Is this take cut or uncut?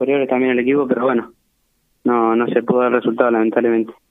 uncut